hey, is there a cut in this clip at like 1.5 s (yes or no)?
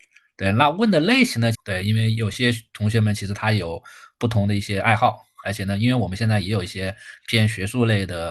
yes